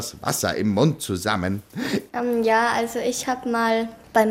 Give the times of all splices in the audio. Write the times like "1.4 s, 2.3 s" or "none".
2.1 s